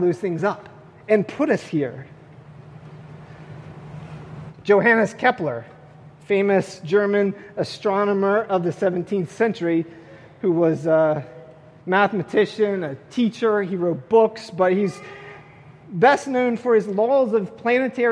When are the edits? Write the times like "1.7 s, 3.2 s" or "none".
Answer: none